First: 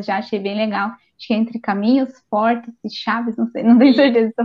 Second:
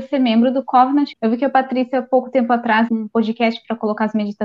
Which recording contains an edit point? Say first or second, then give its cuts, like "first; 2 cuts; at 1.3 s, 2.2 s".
second; 2 cuts; at 1.1 s, 2.9 s